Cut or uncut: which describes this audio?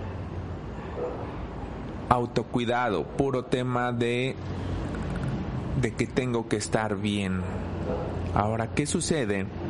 uncut